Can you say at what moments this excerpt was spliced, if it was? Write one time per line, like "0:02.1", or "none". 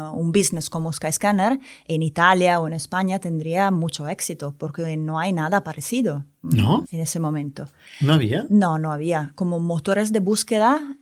0:06.8